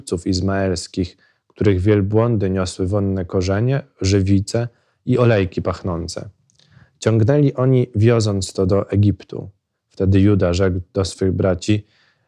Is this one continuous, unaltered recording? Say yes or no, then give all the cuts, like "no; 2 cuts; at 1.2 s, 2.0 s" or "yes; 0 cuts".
yes; 0 cuts